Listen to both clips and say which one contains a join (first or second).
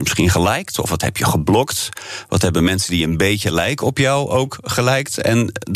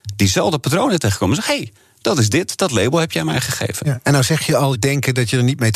second